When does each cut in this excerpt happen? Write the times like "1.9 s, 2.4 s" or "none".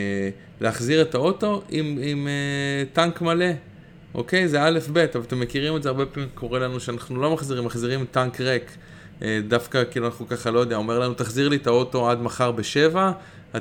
none